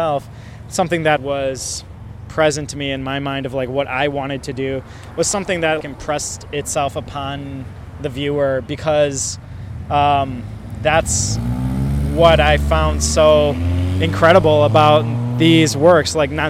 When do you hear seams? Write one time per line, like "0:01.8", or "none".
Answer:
0:01.2
0:05.8